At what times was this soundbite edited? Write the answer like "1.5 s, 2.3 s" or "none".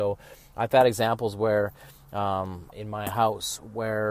2.7 s